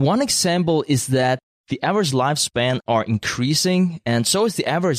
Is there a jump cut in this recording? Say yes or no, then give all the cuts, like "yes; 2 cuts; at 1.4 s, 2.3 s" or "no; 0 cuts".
no; 0 cuts